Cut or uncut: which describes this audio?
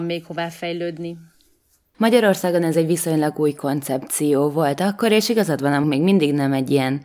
cut